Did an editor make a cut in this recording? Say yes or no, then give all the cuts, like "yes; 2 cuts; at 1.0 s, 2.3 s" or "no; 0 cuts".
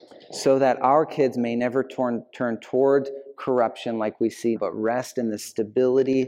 yes; 1 cut; at 4.6 s